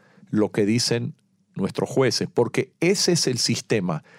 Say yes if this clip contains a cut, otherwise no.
no